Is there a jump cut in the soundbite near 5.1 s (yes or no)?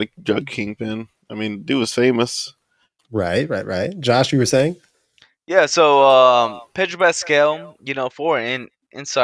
no